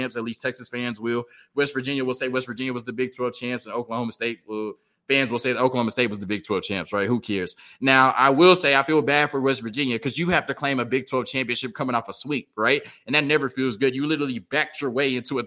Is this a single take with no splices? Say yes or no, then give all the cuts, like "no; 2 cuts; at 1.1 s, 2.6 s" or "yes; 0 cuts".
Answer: yes; 0 cuts